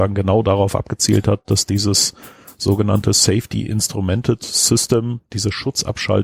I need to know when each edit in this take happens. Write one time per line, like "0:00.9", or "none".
none

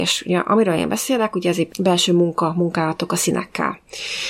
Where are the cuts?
0:01.7

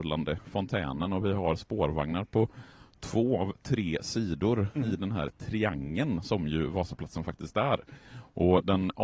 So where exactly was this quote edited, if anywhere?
none

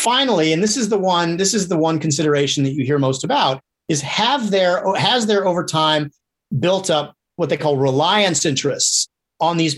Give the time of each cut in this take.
none

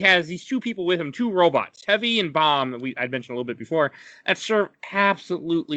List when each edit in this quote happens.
none

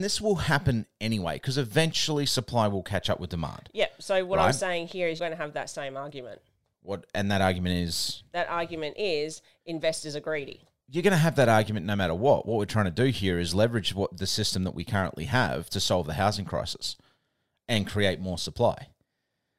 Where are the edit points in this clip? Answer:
0:05.2

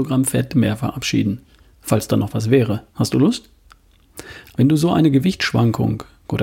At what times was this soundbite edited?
0:02.9
0:04.5

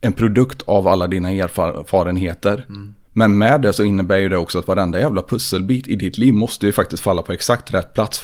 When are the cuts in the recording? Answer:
none

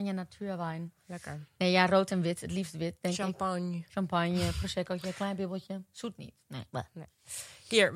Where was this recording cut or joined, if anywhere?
none

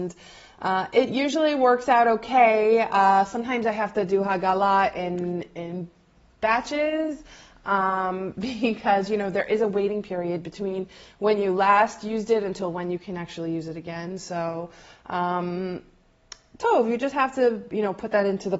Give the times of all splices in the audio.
none

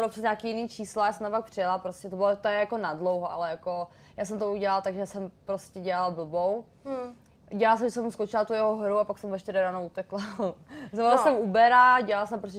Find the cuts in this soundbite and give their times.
none

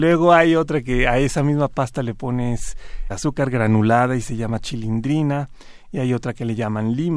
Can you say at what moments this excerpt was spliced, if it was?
0:03.1

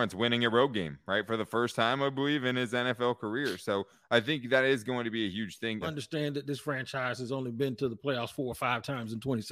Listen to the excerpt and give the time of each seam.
0:05.8

